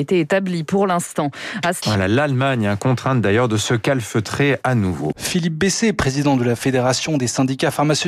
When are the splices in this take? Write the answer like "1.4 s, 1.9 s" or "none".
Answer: 1.8 s, 5.1 s